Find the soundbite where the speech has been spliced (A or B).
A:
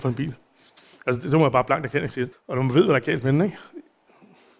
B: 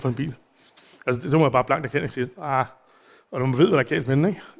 A